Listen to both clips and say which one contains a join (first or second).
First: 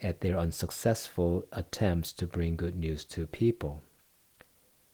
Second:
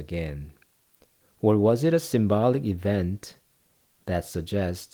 second